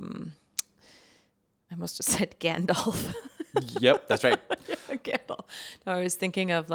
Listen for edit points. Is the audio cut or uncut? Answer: uncut